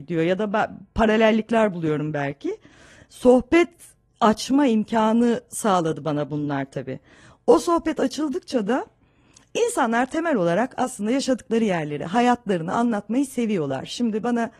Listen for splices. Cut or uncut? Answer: uncut